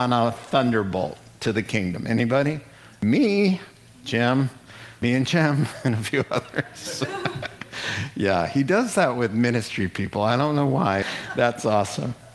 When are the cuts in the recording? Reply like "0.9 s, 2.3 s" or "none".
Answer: 11.0 s

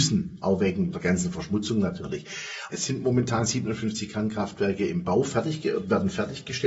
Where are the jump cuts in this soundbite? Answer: 0.9 s, 2.7 s

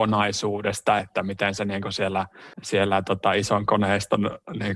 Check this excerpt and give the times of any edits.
1.0 s, 2.5 s

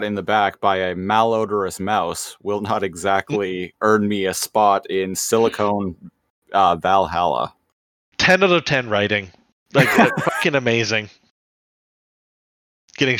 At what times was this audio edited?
none

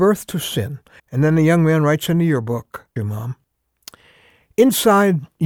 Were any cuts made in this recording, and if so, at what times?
1.0 s, 3.0 s

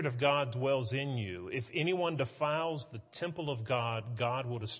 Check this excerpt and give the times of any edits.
none

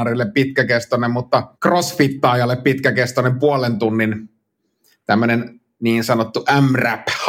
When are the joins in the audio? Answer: 1.5 s

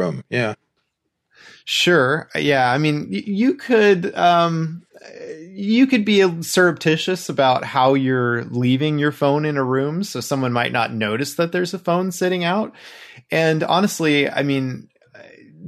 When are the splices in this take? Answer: none

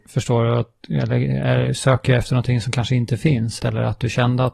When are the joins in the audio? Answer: 3.6 s

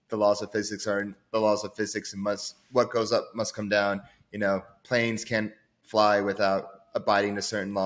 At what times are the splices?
none

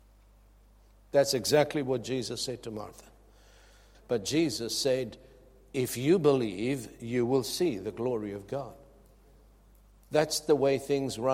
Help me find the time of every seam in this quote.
3.9 s

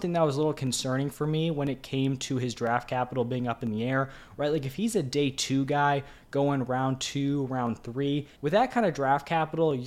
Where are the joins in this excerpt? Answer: 8.4 s

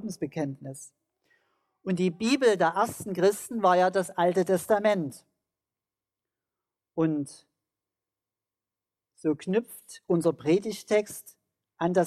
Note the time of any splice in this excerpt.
none

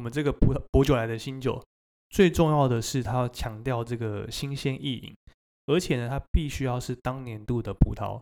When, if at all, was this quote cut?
none

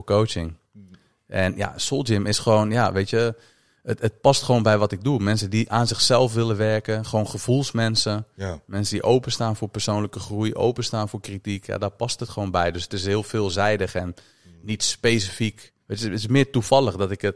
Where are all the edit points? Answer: 15.8 s

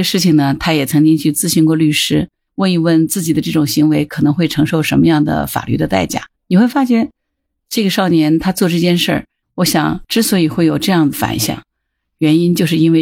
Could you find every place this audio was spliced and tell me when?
6.4 s, 9.4 s

